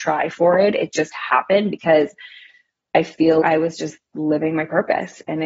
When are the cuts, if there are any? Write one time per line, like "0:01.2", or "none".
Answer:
0:03.4